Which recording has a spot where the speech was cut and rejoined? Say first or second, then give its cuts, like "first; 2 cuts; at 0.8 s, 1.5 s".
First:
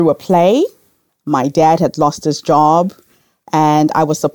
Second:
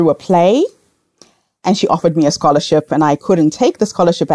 first; 1 cut; at 1.1 s